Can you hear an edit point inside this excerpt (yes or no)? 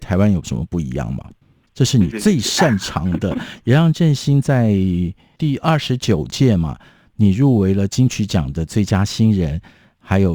yes